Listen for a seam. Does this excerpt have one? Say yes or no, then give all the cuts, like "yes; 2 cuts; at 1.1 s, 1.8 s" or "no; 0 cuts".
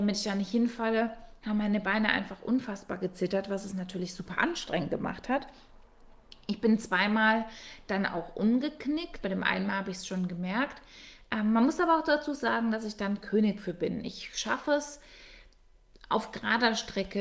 yes; 1 cut; at 9.2 s